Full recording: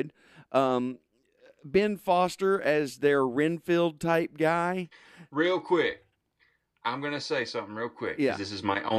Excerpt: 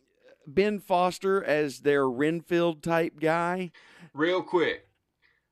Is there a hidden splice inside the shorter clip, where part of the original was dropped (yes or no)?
no